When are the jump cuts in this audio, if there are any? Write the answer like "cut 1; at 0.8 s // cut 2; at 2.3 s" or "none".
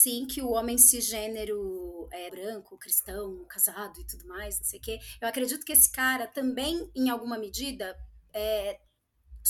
cut 1; at 2.3 s